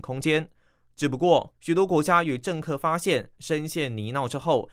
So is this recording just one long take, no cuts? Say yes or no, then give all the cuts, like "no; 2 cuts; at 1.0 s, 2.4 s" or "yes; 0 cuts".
no; 2 cuts; at 1.5 s, 3.3 s